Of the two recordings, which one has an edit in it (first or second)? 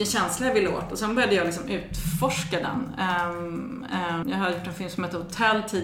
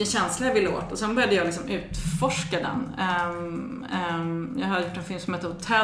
first